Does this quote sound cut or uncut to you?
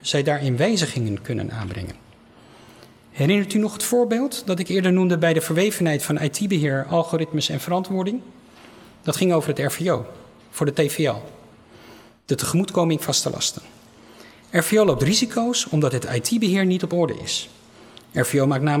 uncut